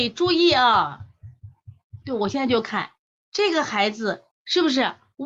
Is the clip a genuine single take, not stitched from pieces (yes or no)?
no